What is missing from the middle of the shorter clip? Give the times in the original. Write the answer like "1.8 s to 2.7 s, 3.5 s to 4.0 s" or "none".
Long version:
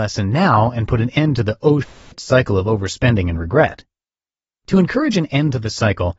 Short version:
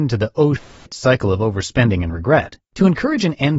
3.9 s to 4.6 s

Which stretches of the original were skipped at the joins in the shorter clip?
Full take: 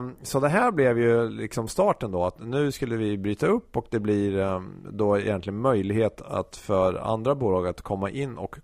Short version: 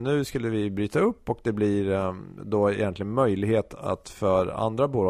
none

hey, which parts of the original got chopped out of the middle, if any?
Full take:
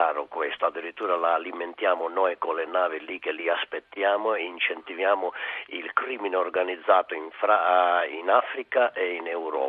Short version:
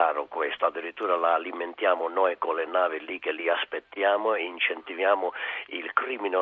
none

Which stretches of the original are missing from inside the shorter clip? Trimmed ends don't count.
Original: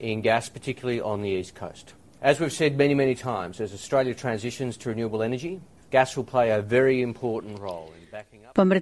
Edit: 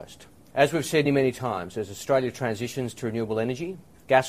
2.7 s to 2.9 s

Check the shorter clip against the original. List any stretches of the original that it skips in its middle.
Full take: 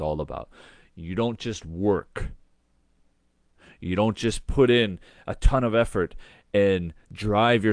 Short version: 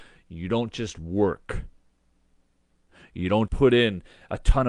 4.1 s to 4.4 s

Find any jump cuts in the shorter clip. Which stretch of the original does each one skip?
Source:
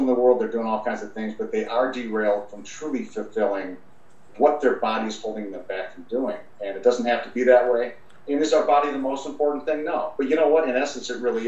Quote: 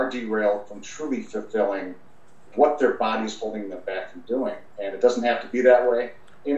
none

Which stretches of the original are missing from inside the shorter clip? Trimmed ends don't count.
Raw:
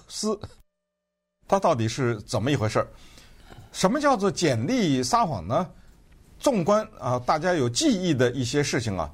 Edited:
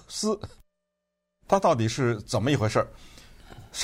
none

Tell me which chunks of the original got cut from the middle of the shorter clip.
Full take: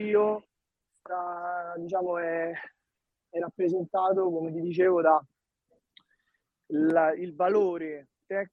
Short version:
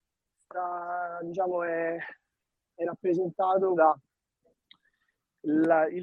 4.3 s to 5.0 s

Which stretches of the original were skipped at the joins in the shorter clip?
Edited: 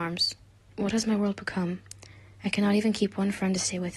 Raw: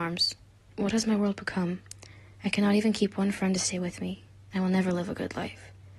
none

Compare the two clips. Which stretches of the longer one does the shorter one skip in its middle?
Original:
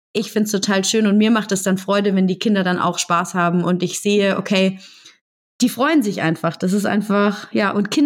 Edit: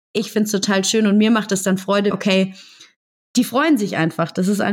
2.1 s to 4.4 s

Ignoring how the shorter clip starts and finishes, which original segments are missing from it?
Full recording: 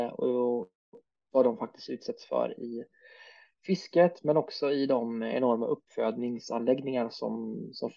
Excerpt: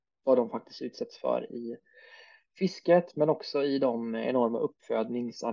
none

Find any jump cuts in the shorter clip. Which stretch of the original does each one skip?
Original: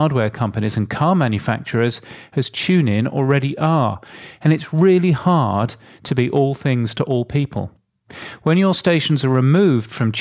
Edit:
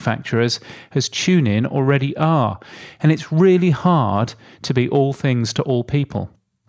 none

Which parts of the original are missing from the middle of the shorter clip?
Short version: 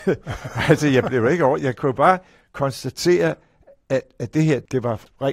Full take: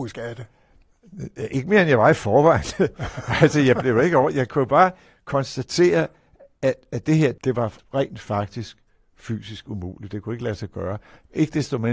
none

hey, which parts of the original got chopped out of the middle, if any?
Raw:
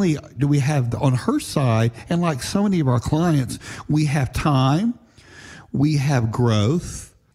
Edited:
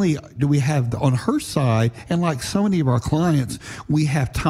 none

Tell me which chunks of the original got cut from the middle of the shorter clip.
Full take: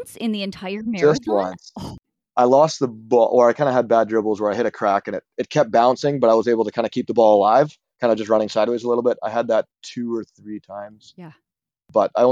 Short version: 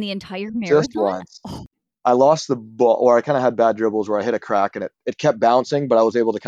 none

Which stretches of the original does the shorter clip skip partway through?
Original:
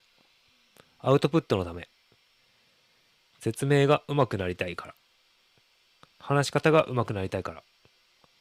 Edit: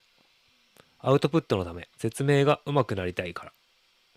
1.9 s to 3.3 s

